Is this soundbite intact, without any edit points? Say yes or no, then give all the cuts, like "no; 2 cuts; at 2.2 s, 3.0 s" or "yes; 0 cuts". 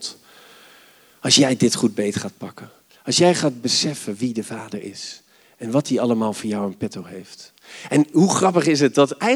yes; 0 cuts